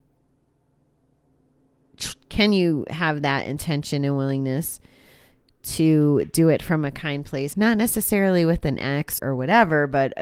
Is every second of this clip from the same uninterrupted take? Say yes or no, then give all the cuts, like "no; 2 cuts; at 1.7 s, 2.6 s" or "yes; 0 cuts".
no; 2 cuts; at 7.5 s, 9.2 s